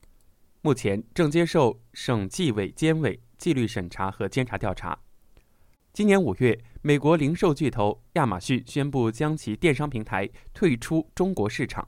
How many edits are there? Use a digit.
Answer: 1